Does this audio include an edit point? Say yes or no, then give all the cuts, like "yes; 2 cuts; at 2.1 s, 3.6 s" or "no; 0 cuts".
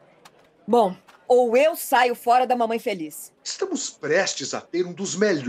yes; 2 cuts; at 1.3 s, 3.4 s